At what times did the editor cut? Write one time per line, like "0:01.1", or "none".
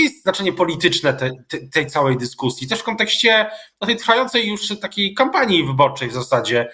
none